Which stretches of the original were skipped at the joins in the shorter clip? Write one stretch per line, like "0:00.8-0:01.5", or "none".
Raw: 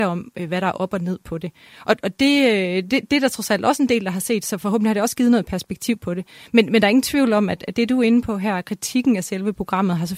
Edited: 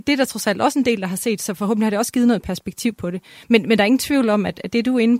none